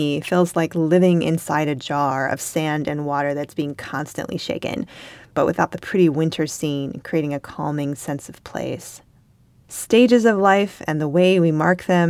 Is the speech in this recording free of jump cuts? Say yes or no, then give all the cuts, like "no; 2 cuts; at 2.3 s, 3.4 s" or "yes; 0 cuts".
no; 2 cuts; at 5.3 s, 9.6 s